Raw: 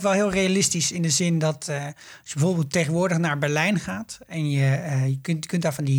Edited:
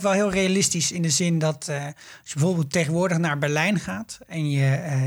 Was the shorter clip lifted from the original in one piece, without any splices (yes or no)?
yes